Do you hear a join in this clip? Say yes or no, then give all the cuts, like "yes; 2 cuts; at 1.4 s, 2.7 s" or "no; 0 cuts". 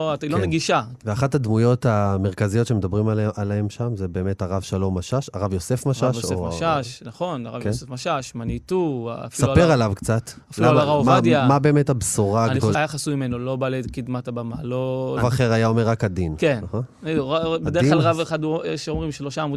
yes; 3 cuts; at 1.0 s, 12.7 s, 15.2 s